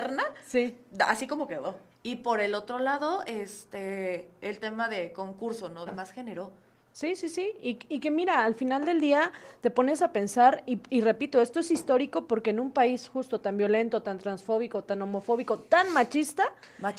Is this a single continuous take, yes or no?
no